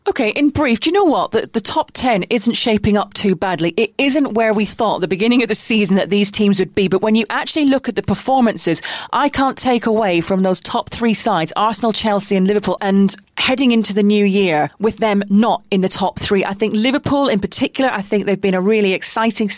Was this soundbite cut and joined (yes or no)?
yes